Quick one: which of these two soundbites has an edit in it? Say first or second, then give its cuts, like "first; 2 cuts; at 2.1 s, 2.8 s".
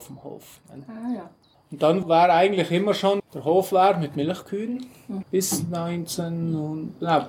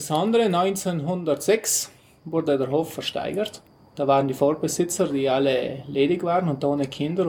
first; 2 cuts; at 3.2 s, 5.2 s